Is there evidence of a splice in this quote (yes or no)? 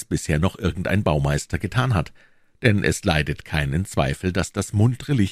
no